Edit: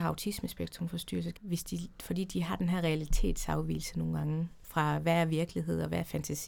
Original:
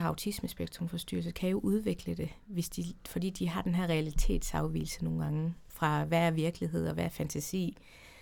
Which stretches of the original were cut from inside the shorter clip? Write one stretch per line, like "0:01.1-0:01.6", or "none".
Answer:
0:01.3-0:02.4

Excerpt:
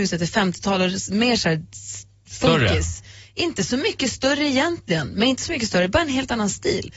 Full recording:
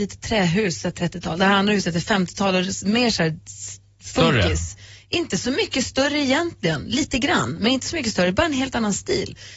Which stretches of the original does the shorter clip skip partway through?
0:06.9-0:07.6

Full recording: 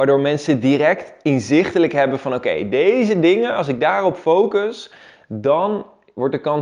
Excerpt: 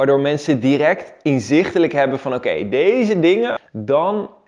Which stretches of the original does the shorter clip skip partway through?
0:03.6-0:05.1

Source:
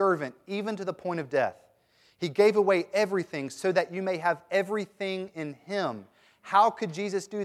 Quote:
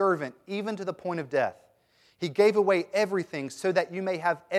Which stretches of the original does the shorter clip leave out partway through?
none

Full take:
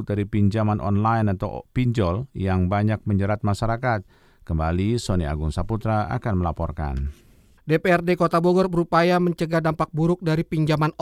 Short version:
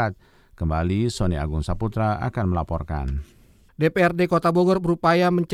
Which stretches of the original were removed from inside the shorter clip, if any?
none

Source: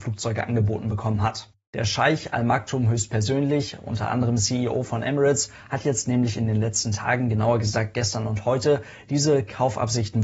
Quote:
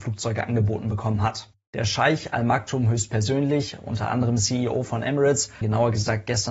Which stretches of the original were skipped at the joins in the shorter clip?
0:05.6-0:07.3

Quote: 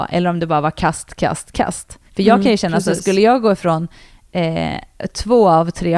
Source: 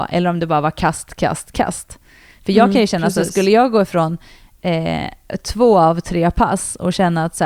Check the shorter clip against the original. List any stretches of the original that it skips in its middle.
0:02.1-0:02.4

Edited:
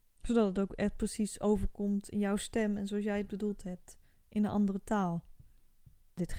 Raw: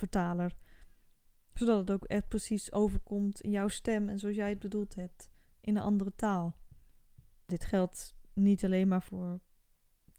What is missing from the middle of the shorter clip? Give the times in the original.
none

